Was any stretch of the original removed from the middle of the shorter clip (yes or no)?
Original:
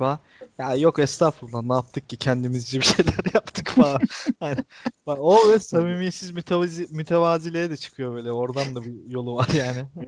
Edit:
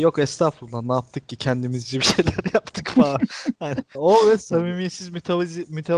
yes